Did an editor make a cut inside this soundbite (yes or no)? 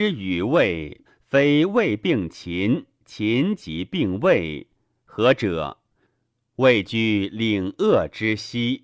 yes